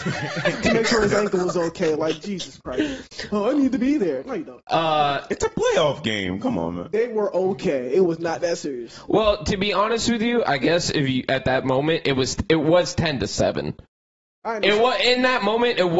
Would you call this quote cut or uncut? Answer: uncut